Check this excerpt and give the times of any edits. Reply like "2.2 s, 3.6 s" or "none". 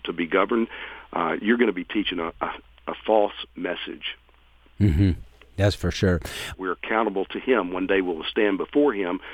6.5 s